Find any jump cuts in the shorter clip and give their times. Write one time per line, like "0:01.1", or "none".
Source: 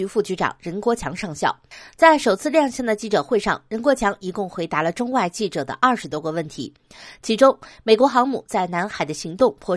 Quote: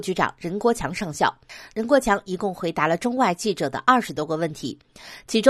0:01.7